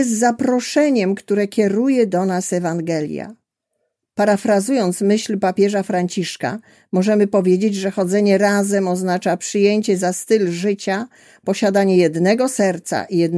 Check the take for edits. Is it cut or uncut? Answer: uncut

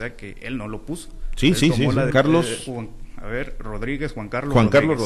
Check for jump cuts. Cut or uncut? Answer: cut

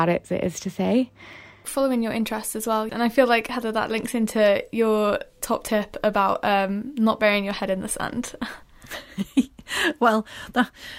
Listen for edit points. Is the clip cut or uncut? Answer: cut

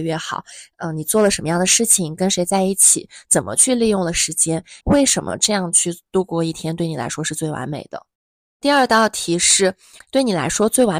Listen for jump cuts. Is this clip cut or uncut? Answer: cut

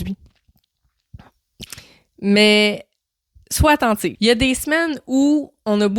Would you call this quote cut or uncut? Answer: cut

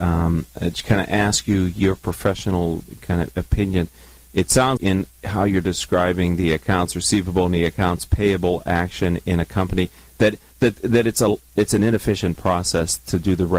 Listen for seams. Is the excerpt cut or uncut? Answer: cut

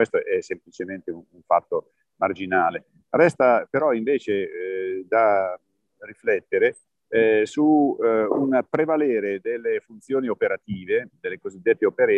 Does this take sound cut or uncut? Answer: uncut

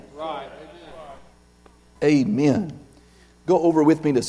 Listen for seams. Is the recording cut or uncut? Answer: cut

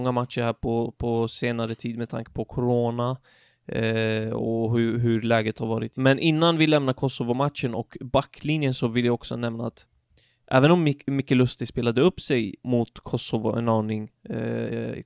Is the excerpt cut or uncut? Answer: uncut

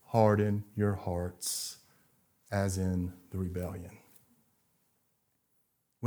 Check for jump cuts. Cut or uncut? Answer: uncut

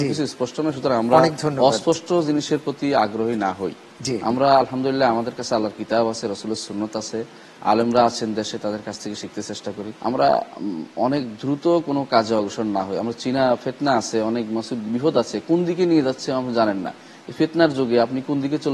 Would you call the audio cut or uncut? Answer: cut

